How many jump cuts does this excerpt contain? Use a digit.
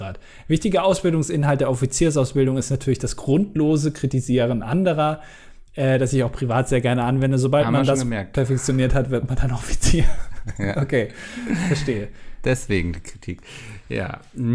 0